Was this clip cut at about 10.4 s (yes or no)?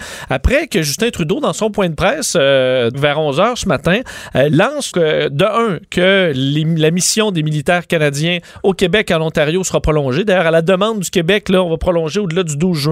no